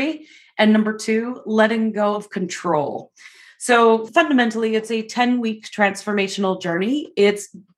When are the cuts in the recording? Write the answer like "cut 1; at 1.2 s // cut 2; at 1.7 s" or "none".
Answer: none